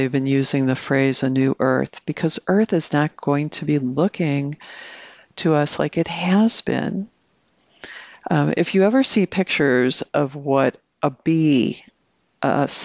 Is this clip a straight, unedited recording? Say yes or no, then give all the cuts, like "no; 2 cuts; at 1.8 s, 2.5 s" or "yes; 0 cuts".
yes; 0 cuts